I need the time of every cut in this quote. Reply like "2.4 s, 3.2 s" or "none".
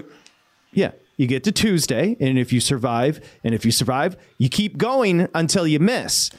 3.4 s